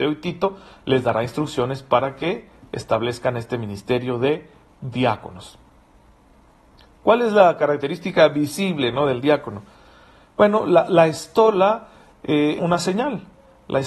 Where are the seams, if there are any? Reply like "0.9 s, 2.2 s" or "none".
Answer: 12.6 s